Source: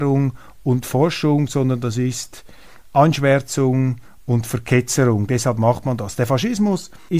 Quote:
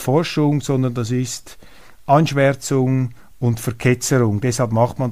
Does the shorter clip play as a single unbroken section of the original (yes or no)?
yes